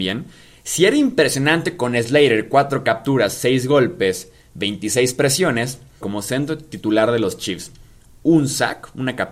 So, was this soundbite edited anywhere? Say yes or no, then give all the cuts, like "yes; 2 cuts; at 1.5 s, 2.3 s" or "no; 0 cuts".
yes; 1 cut; at 6.0 s